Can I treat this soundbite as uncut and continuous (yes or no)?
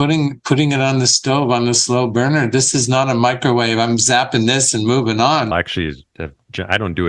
no